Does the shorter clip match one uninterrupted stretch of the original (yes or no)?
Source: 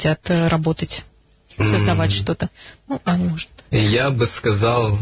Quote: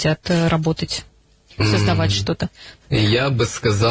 no